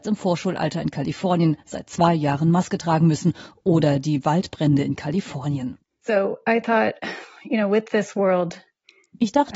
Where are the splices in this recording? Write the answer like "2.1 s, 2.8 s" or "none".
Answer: none